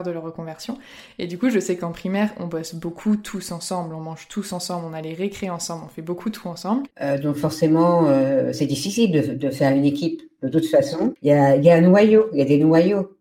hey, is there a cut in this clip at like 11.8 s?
no; 1 cut; at 6.9 s

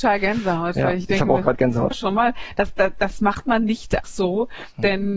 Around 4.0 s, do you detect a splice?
yes; 2 cuts; at 1.9 s, 4.0 s

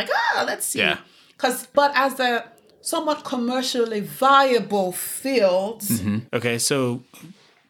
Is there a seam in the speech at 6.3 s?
yes; 2 cuts; at 1.7 s, 6.3 s

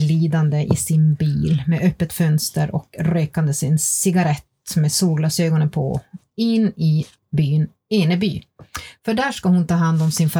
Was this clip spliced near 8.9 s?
no; 0 cuts

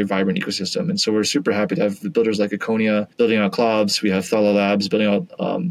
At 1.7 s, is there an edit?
no; 1 cut; at 3.1 s

